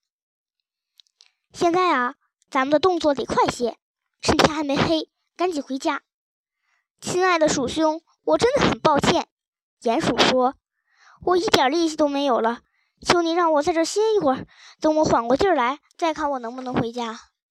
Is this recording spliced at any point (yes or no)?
no